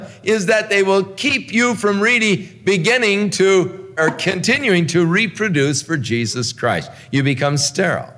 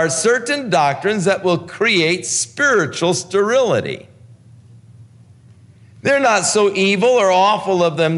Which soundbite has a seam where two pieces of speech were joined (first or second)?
first